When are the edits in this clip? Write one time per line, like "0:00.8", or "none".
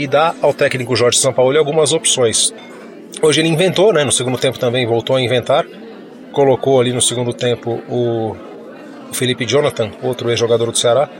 none